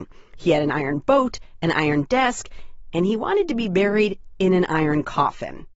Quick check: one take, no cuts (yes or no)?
yes